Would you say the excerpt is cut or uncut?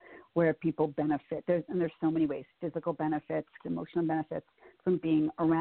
cut